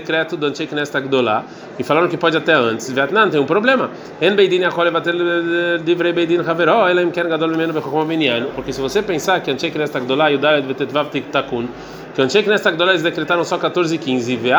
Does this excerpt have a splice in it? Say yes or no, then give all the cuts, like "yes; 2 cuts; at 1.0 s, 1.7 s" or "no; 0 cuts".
yes; 1 cut; at 8.5 s